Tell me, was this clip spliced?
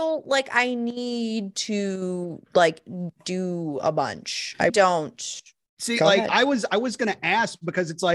yes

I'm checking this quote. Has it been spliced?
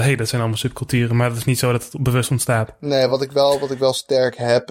no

